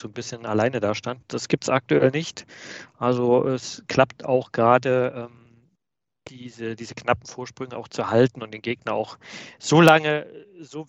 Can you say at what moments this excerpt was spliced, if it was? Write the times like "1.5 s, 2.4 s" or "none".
none